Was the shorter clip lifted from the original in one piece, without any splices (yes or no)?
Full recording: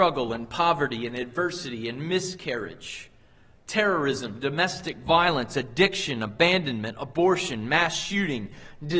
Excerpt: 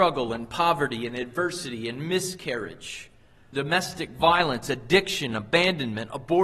no